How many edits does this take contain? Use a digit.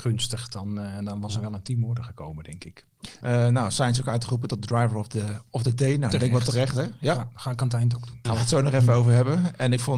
2